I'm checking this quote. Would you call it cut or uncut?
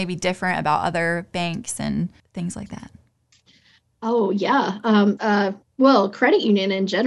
cut